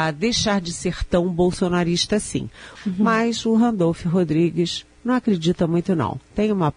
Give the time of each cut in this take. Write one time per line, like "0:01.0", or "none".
0:02.7